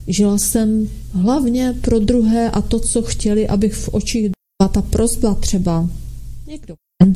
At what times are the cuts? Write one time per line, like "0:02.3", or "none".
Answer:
none